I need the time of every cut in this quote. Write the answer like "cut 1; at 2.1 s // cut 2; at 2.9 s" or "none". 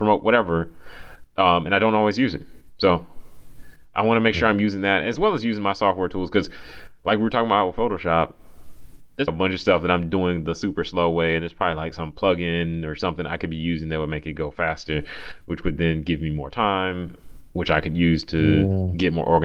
cut 1; at 9.3 s